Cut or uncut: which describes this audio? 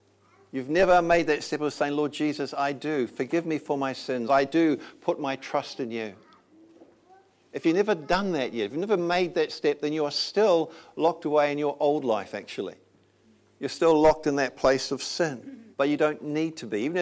cut